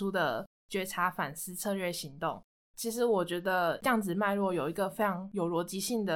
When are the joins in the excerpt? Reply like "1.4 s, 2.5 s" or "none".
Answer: none